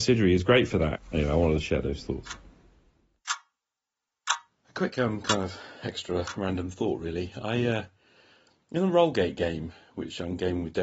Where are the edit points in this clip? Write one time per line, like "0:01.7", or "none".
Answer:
0:00.9

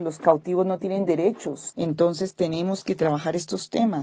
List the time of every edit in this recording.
0:01.7

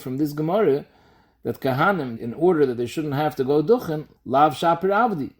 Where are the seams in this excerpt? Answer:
0:02.2
0:04.2

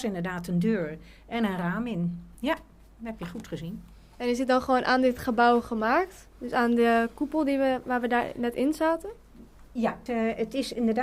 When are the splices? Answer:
0:10.1

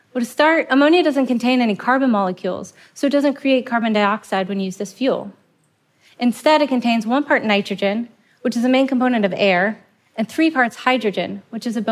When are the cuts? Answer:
none

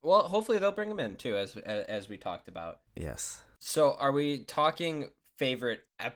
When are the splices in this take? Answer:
0:03.6

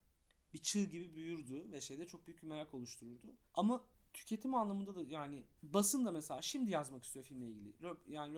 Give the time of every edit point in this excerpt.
0:03.5

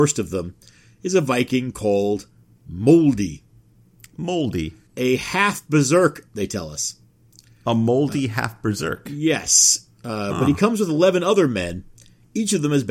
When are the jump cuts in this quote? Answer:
0:04.9

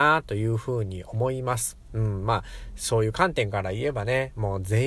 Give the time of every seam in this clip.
0:01.9

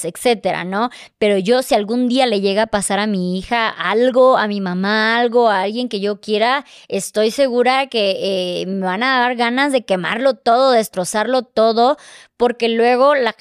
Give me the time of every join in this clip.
none

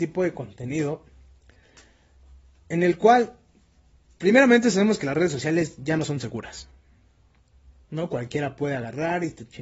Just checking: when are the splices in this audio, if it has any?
0:07.8

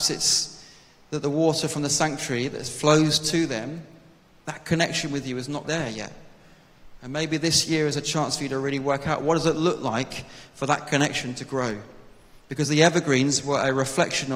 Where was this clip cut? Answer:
0:05.6

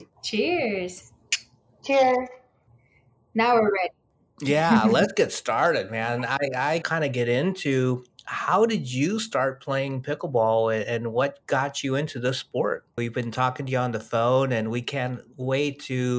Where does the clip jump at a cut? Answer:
0:06.8
0:13.0

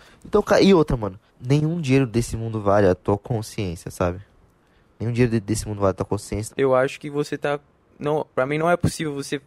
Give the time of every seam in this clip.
0:01.3
0:06.5

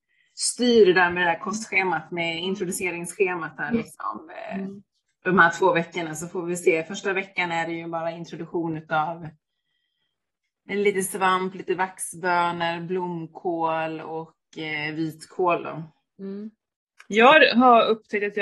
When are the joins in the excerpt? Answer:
none

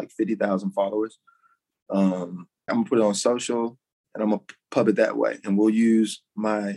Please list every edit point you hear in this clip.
0:02.7

